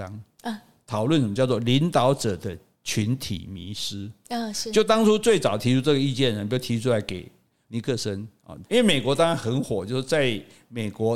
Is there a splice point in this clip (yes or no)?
yes